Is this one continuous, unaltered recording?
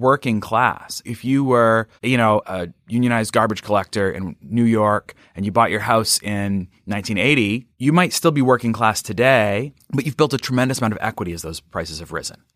no; 1 cut; at 2.0 s

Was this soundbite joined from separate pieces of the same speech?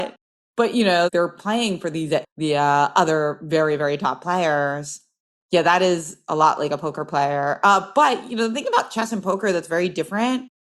yes; 1 cut; at 2.2 s

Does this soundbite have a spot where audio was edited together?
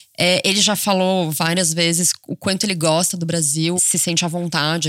yes; 1 cut; at 3.8 s

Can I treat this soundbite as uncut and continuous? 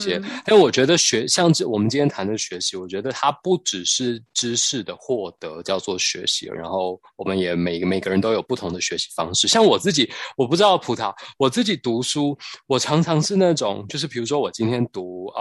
no; 1 cut; at 6.6 s

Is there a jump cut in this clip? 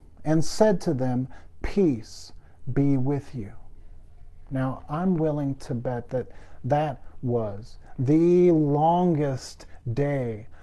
no; 0 cuts

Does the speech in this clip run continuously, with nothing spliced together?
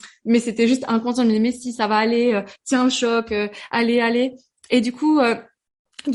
yes; 0 cuts

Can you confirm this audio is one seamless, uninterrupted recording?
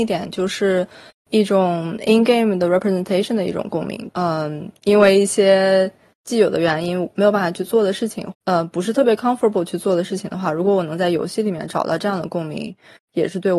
no; 2 cuts; at 4.1 s, 8.3 s

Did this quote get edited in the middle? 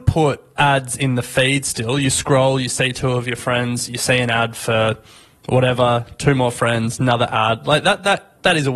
no; 0 cuts

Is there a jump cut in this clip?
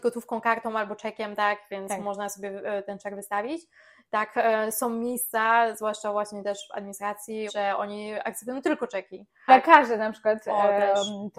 yes; 2 cuts; at 7.5 s, 9.5 s

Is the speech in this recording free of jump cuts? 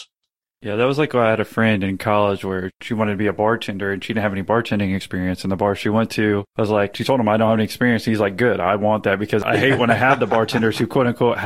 yes; 0 cuts

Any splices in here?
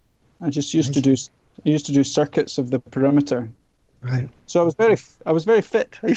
no; 0 cuts

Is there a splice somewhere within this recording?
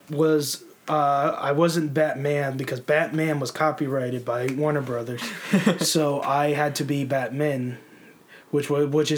no; 0 cuts

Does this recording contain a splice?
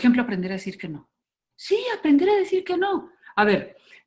yes; 1 cut; at 1.5 s

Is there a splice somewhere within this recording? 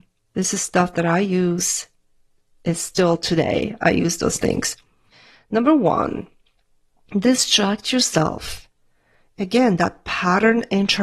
no; 0 cuts

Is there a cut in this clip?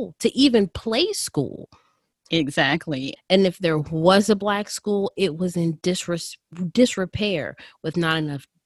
yes; 1 cut; at 3.2 s

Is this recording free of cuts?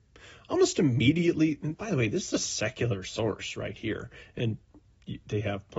yes; 0 cuts

